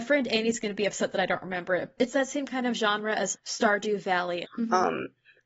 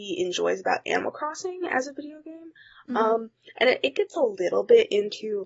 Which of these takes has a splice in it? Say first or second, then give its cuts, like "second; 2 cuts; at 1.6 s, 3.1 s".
first; 3 cuts; at 2.0 s, 3.3 s, 4.4 s